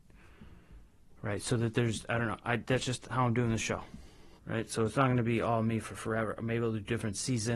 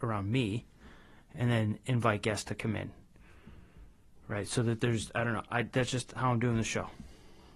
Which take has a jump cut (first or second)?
first